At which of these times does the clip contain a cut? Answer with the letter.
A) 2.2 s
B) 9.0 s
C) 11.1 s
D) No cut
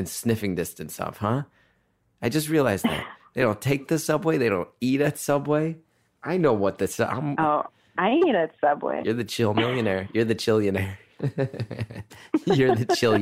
B